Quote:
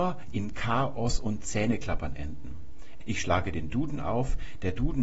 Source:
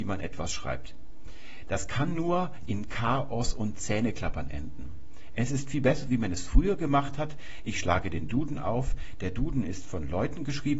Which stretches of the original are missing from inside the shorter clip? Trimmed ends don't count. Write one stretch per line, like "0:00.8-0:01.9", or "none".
0:05.4-0:07.6